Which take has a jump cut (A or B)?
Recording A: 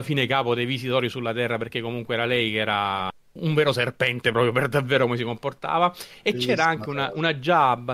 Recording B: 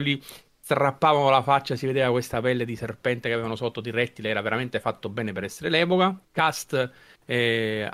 B